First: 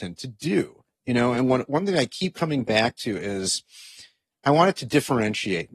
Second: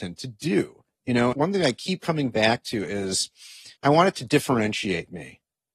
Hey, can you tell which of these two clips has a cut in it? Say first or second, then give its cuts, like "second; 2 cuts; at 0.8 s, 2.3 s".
second; 2 cuts; at 1.3 s, 3.8 s